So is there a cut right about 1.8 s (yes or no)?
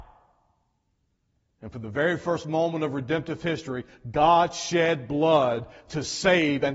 no